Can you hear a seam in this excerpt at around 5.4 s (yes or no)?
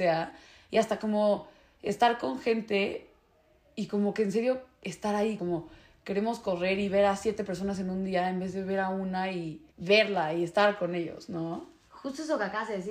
yes